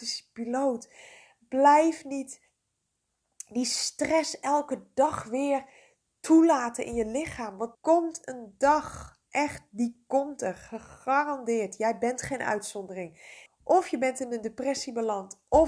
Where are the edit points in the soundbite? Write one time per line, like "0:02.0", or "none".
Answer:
0:07.7
0:13.5